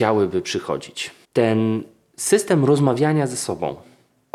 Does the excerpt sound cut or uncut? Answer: cut